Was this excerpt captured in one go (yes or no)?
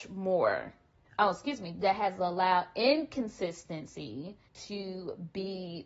no